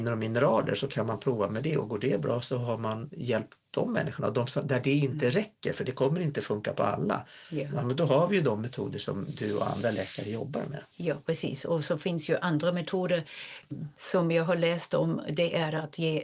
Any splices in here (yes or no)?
yes